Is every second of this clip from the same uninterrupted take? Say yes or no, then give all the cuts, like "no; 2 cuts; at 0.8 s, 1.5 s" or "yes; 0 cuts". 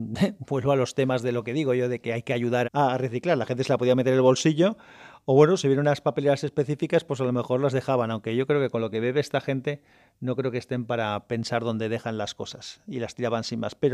no; 1 cut; at 2.6 s